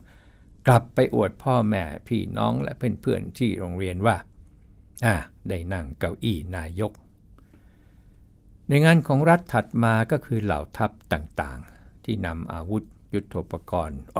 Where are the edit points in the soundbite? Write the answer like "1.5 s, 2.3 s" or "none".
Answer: none